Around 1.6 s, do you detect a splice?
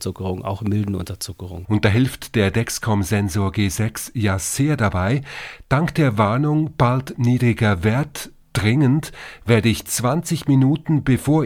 yes; 1 cut; at 1.6 s

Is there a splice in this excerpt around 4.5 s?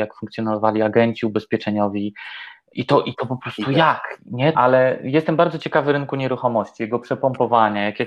yes; 2 cuts; at 2.7 s, 4.5 s

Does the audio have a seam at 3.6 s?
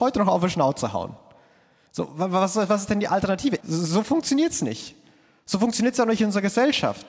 yes; 1 cut; at 3.6 s

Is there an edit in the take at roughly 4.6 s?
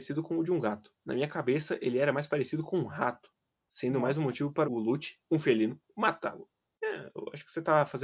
yes; 1 cut; at 4.6 s

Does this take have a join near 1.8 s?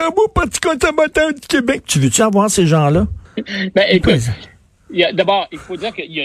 no; 1 cut; at 3.2 s

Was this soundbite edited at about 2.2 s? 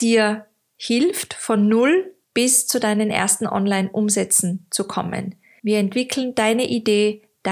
yes; 2 cuts; at 2.2 s, 5.6 s

